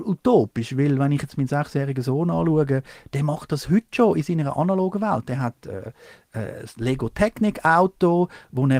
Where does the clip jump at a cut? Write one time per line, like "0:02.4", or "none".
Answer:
none